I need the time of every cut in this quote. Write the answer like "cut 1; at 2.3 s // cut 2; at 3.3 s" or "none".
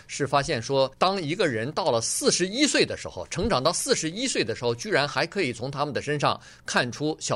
cut 1; at 0.9 s